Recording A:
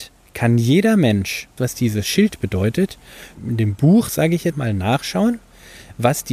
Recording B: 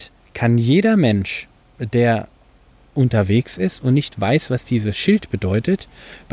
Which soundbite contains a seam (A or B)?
A